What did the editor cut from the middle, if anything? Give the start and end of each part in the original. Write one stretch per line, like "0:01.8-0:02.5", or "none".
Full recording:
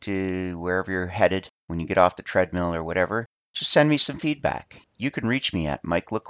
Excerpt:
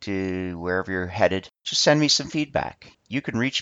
0:01.6-0:03.5